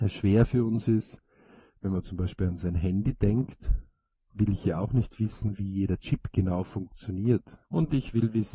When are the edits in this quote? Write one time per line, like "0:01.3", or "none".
0:07.6